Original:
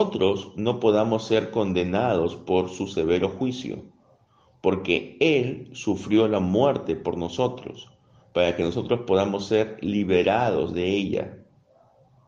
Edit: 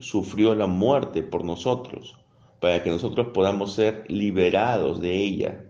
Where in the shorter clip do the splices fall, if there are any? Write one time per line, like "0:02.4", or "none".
none